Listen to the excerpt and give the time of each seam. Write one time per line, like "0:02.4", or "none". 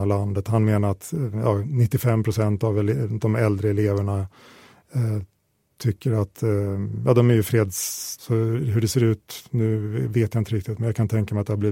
0:08.2